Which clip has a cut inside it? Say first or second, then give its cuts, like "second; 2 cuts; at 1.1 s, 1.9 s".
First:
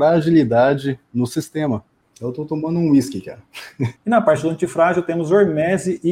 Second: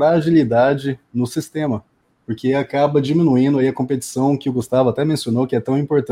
first; 2 cuts; at 2.1 s, 4.0 s